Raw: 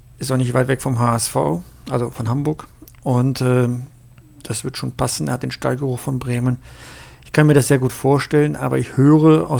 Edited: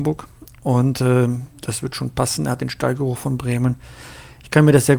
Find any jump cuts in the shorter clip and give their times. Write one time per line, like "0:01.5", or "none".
0:01.5

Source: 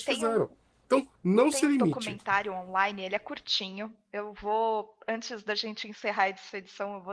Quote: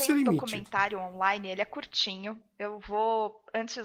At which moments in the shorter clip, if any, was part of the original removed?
none

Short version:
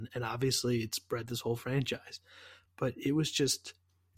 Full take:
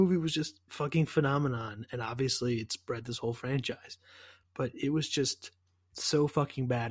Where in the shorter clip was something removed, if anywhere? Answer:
none

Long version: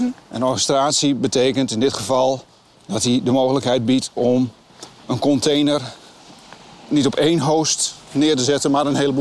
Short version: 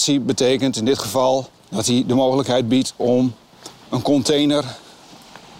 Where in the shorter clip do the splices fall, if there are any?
0:01.6

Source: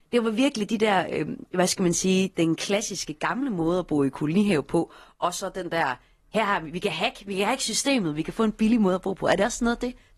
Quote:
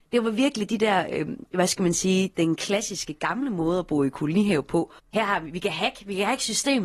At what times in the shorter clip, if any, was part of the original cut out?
0:05.0

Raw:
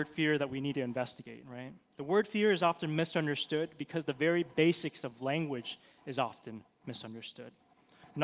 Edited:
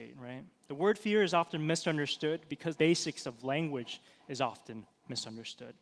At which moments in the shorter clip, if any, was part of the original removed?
0:02.8

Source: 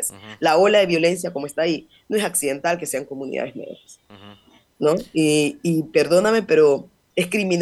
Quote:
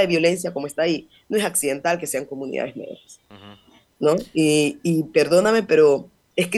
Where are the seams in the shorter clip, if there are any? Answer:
none

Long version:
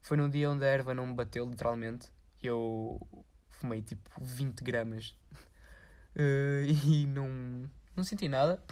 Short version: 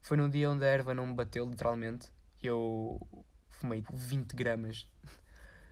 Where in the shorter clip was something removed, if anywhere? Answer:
0:03.8

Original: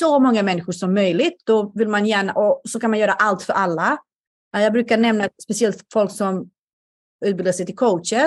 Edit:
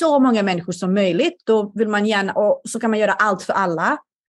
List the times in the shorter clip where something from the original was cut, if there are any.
none

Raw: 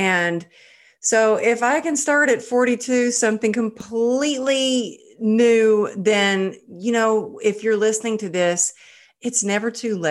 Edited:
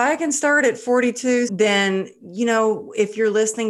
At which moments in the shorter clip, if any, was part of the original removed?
0:01.5

